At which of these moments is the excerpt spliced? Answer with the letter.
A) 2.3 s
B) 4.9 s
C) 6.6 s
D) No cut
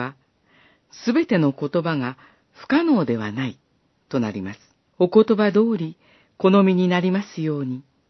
B